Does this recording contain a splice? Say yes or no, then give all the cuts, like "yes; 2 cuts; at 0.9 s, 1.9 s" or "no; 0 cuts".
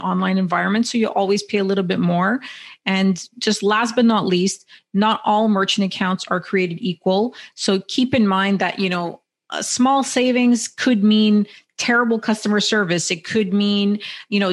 no; 0 cuts